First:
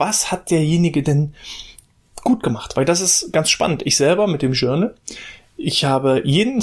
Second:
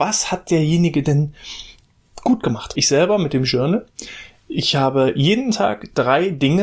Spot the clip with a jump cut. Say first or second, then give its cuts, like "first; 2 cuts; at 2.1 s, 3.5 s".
second; 1 cut; at 2.7 s